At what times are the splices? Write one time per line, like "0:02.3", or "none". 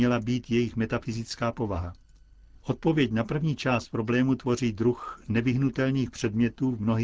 0:02.6